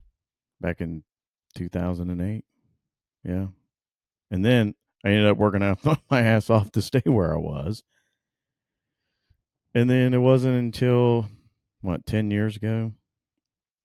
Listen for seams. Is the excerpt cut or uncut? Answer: cut